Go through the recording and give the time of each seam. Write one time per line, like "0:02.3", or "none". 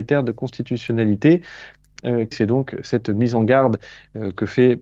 0:02.3